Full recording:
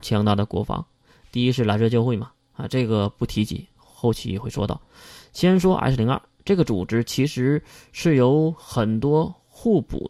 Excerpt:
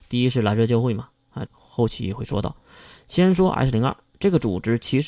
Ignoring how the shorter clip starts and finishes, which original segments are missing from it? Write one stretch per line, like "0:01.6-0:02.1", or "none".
0:02.7-0:03.7